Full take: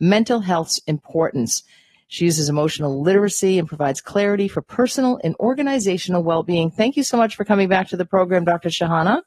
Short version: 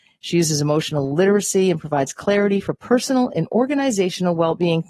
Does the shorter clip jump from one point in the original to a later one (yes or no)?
no